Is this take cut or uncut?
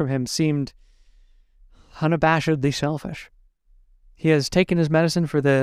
uncut